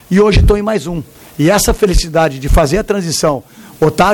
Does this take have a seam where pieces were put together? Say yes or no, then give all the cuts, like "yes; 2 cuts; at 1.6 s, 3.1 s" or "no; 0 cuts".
no; 0 cuts